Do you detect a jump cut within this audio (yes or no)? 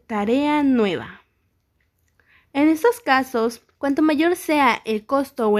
yes